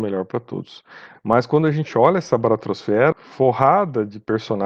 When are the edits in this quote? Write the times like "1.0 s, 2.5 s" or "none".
1.1 s, 3.1 s